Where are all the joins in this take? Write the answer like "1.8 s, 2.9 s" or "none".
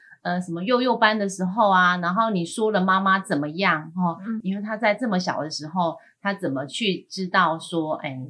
4.4 s